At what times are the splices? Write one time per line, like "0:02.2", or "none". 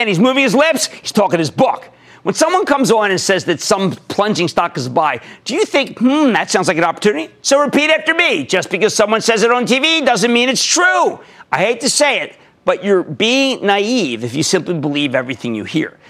0:01.1
0:07.4